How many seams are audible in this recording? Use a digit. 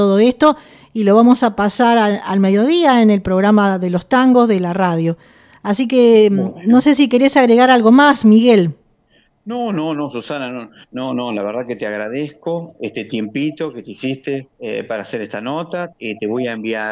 2